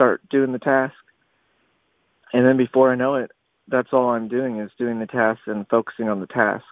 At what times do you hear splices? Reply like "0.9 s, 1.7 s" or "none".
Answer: none